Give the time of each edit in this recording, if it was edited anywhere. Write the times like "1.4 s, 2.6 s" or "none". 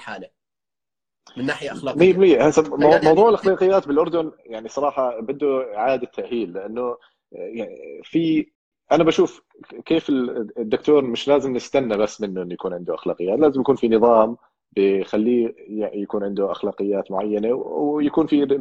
none